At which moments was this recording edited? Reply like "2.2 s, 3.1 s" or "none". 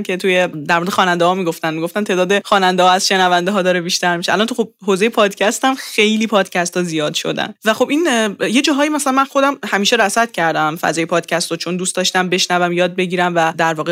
none